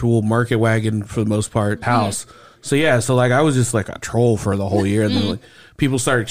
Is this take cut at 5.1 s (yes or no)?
no